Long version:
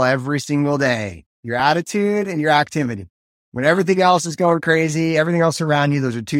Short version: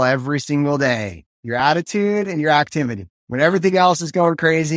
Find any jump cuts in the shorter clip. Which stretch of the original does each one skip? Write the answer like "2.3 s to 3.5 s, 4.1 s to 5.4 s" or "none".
3.2 s to 3.4 s